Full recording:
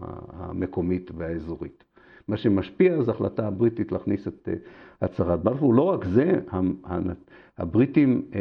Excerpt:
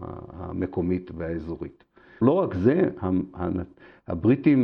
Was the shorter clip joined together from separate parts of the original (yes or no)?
yes